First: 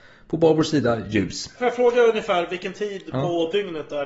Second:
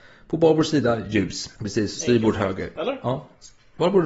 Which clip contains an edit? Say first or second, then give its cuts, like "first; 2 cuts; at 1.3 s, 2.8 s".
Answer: second; 1 cut; at 1.5 s